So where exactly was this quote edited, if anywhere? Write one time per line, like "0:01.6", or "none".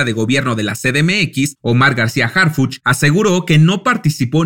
none